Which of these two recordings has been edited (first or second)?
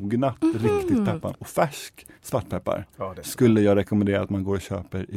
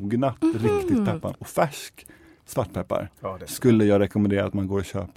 first